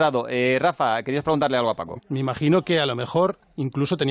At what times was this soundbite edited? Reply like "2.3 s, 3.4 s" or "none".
2.0 s